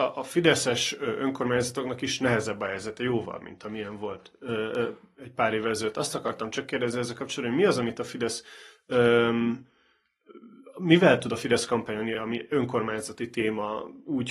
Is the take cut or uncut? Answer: uncut